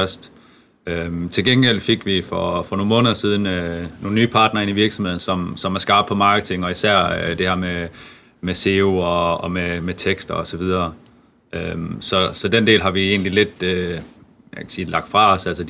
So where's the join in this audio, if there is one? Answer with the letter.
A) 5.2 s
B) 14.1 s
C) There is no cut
C